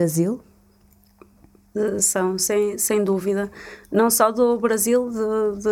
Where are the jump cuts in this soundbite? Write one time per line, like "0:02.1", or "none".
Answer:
none